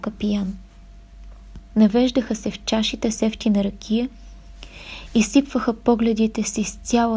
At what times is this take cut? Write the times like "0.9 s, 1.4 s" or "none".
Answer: 1.7 s